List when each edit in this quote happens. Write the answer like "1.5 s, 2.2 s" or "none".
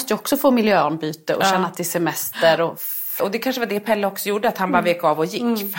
3.2 s